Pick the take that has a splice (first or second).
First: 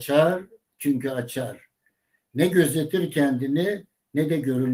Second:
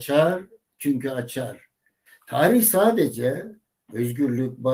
second